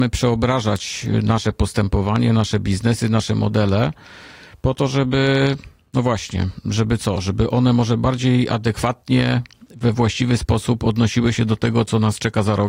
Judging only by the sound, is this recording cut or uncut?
uncut